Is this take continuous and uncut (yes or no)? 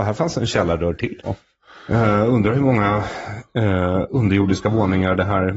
no